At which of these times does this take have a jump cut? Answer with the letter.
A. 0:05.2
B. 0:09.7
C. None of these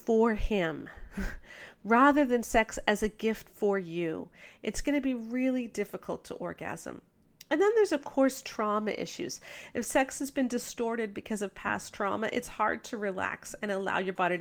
C